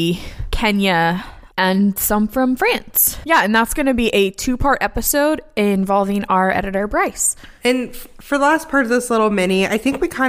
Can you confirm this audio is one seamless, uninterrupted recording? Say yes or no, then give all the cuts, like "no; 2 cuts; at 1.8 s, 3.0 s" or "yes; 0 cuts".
no; 1 cut; at 3.2 s